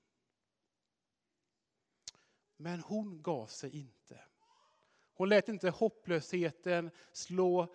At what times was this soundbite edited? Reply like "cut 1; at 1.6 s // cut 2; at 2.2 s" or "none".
cut 1; at 2.4 s

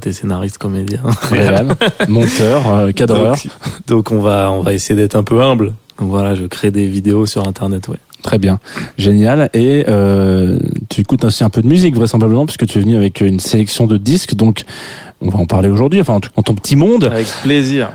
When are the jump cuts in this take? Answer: cut 1; at 15.1 s // cut 2; at 16.3 s

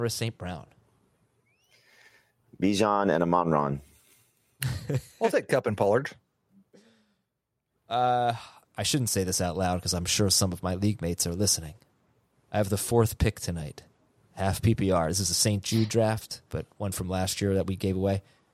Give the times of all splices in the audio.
cut 1; at 16.5 s

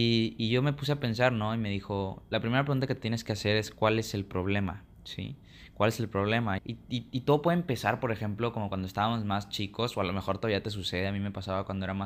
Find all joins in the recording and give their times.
cut 1; at 4.9 s // cut 2; at 6.6 s

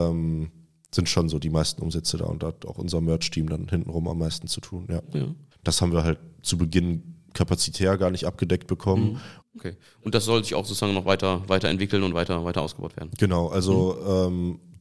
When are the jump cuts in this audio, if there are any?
cut 1; at 5.5 s // cut 2; at 9.4 s

